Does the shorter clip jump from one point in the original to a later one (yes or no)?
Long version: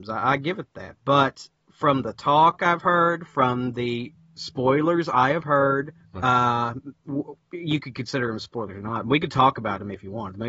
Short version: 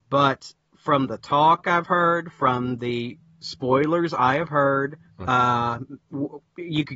no